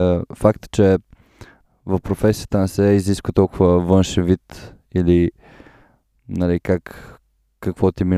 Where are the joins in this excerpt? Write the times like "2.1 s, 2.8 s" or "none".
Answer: none